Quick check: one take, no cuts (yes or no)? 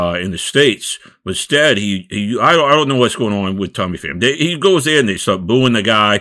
yes